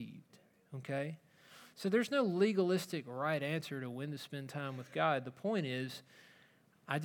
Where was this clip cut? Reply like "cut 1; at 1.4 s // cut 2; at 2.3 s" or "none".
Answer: none